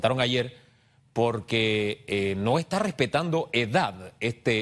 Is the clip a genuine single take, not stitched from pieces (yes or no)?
yes